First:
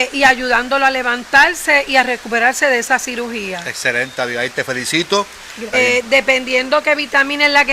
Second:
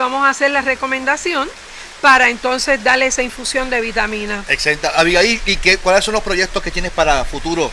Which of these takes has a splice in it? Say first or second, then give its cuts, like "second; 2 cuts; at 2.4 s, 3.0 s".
first; 1 cut; at 5.7 s